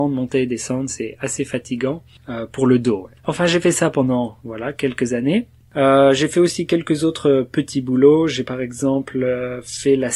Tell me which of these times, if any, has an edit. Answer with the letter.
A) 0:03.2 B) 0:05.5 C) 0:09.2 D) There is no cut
A